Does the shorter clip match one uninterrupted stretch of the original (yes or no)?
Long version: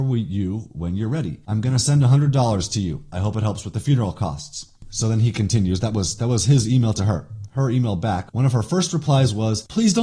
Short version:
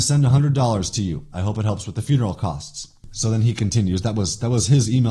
yes